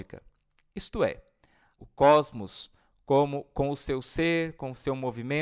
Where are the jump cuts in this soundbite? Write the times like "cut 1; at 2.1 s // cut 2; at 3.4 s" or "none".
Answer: cut 1; at 1.8 s